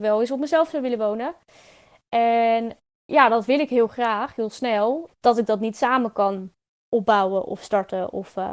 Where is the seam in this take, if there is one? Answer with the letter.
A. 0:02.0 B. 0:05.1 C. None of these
B